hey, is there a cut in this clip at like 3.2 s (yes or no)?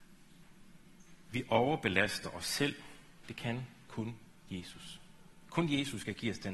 yes